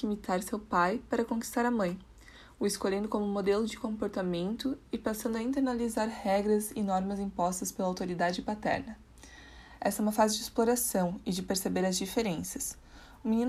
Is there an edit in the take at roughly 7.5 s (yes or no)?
no